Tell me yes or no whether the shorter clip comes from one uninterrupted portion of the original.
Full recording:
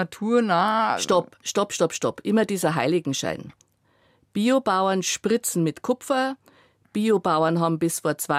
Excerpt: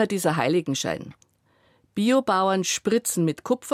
yes